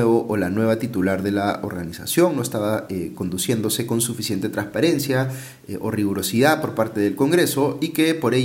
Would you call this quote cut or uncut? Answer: uncut